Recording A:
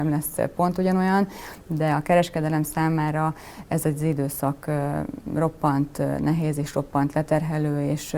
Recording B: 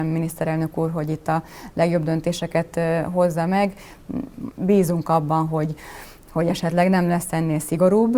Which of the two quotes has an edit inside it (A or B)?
B